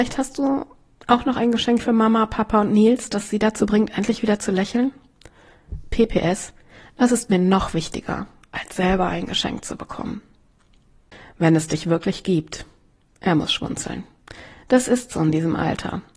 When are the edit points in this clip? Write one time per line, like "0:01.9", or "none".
none